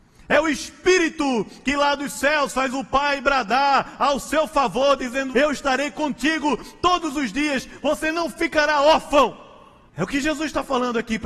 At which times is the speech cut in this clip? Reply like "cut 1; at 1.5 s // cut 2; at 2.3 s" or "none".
cut 1; at 5.3 s // cut 2; at 9.9 s

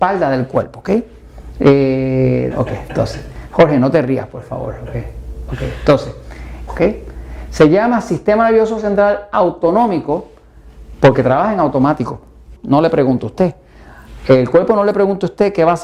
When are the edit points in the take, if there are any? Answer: cut 1; at 2.5 s // cut 2; at 6.7 s // cut 3; at 12.5 s

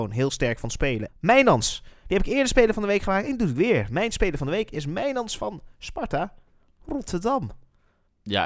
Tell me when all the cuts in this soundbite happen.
cut 1; at 1.1 s

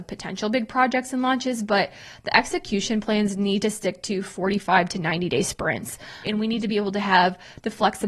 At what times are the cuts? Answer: cut 1; at 6.2 s

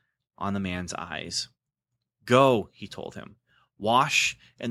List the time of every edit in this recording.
none

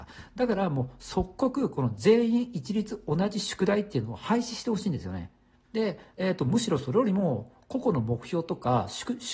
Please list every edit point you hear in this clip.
cut 1; at 5.6 s

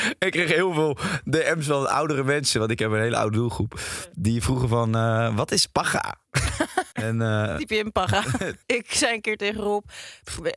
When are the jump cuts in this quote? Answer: cut 1; at 6.9 s // cut 2; at 8.6 s

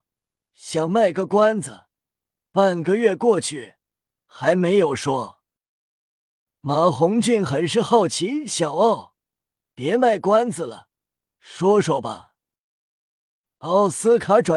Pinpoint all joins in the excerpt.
none

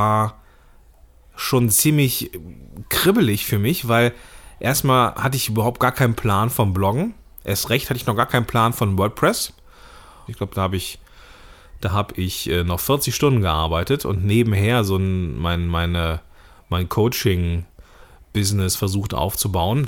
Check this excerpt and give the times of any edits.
cut 1; at 10.3 s

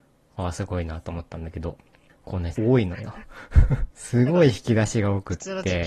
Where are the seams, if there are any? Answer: cut 1; at 2.6 s // cut 2; at 3.9 s

